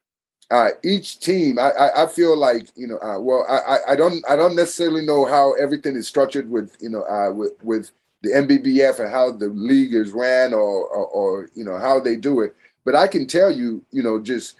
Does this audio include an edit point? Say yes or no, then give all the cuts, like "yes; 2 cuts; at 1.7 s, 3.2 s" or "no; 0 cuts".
no; 0 cuts